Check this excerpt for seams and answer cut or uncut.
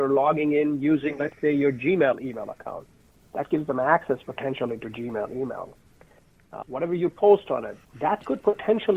cut